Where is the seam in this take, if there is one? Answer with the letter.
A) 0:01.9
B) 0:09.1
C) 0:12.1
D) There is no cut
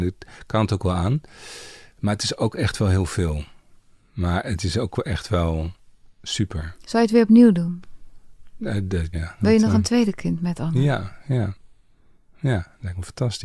B